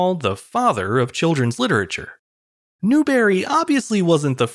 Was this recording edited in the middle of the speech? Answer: no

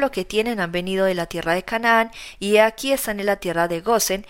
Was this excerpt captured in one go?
yes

